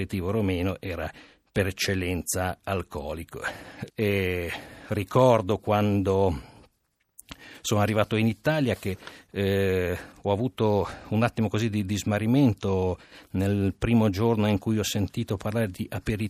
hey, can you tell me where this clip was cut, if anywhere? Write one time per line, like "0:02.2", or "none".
0:03.9